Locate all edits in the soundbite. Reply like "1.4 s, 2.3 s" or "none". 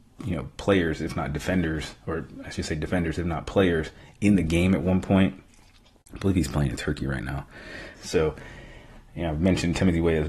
7.9 s